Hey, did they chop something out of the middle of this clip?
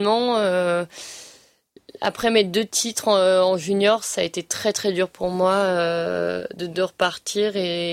yes; 1 cut; at 6.6 s

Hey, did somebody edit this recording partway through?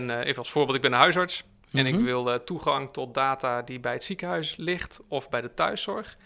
no; 0 cuts

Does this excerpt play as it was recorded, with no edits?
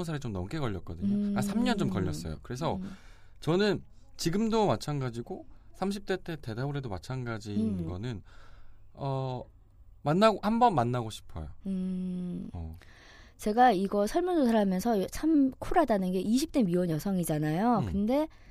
yes; 0 cuts

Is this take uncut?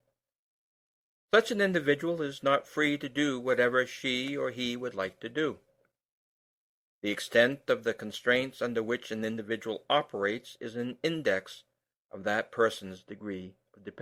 yes; 0 cuts

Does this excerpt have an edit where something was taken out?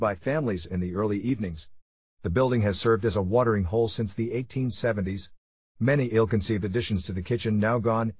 no; 0 cuts

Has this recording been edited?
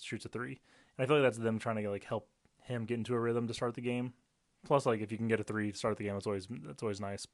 no; 0 cuts

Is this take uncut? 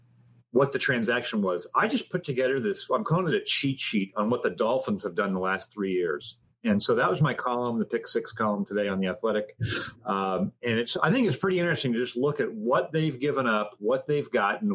yes; 0 cuts

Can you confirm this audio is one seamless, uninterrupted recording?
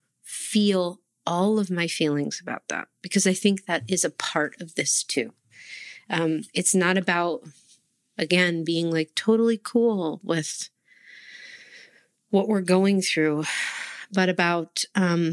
yes; 0 cuts

